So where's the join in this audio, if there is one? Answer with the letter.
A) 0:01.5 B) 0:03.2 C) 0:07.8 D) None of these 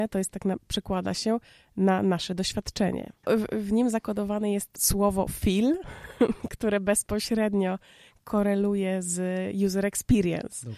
B